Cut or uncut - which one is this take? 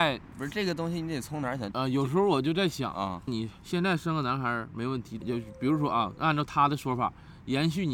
cut